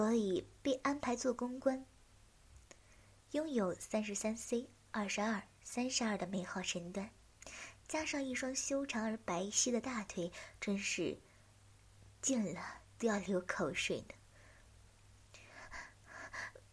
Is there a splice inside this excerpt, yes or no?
no